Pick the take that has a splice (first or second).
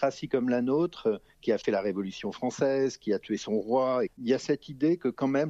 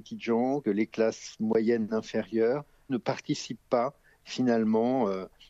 first